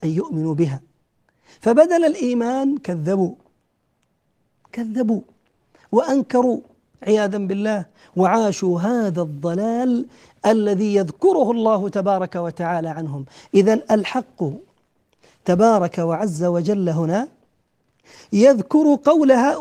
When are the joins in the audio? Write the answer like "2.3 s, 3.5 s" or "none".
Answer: none